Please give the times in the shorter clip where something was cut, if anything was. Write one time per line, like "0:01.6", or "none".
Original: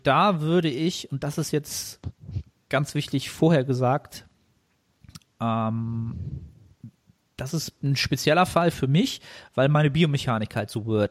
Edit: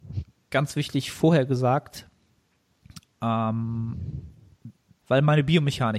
0:05.0